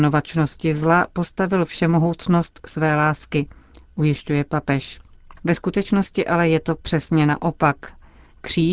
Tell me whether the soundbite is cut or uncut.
cut